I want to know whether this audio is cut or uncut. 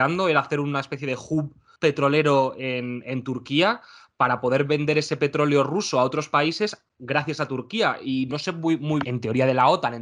cut